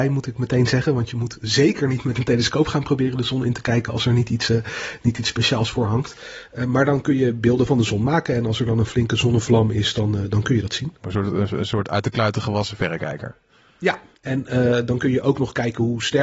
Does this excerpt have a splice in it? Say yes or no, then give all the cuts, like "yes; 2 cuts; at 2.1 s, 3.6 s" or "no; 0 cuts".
yes; 1 cut; at 11.0 s